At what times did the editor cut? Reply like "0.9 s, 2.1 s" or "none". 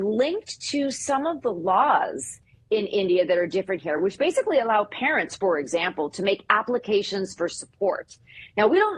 none